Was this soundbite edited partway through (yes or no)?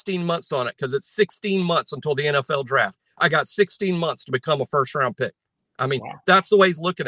no